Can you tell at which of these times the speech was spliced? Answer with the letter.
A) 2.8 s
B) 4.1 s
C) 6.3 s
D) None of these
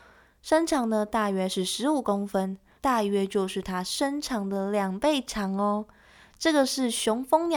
A